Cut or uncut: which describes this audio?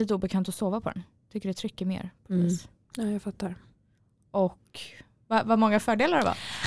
uncut